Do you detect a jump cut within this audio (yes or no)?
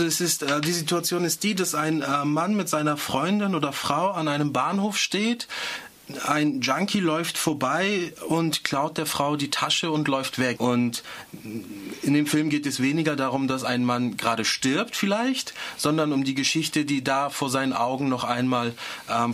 yes